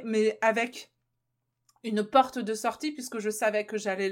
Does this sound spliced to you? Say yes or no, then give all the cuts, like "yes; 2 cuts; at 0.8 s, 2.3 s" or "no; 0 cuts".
no; 0 cuts